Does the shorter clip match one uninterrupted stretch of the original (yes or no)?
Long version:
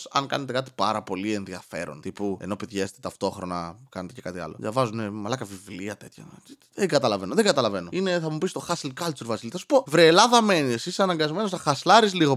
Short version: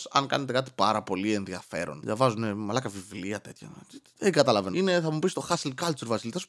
no